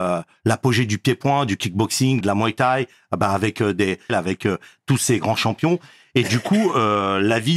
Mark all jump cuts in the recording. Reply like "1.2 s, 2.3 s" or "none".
2.2 s, 4.1 s